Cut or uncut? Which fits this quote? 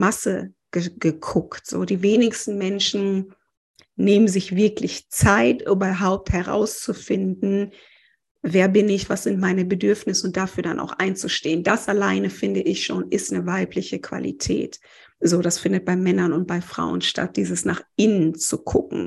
uncut